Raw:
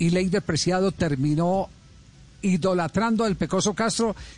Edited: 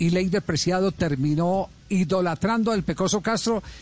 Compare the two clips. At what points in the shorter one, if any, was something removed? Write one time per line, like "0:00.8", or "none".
0:01.8